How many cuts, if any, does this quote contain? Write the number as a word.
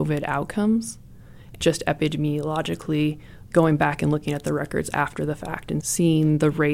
one